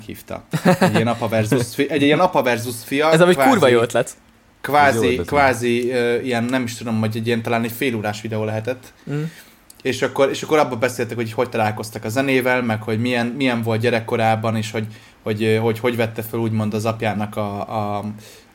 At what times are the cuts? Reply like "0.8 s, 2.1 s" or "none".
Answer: none